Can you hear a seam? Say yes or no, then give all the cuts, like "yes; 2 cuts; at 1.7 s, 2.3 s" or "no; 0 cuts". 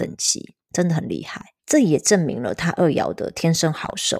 no; 0 cuts